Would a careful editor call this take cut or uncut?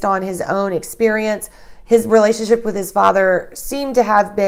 uncut